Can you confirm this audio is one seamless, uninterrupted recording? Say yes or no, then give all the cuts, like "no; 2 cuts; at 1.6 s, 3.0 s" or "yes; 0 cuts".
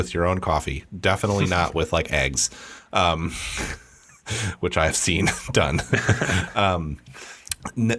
yes; 0 cuts